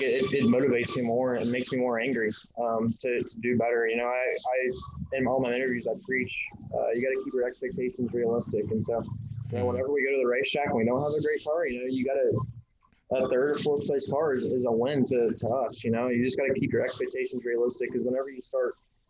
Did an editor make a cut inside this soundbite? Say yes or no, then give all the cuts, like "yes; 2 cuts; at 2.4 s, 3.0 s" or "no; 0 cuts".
no; 0 cuts